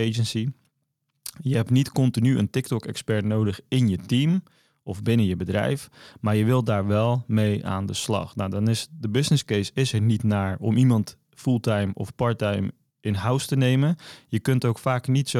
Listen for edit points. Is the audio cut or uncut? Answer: uncut